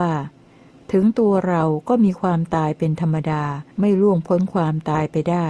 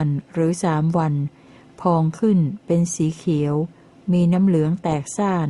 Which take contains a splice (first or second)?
first